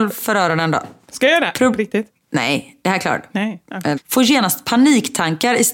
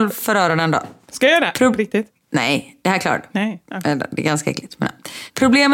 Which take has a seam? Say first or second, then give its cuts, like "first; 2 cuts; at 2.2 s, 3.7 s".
first; 1 cut; at 4.0 s